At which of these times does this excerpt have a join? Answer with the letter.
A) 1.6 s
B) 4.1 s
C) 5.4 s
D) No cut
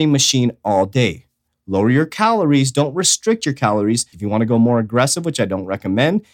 B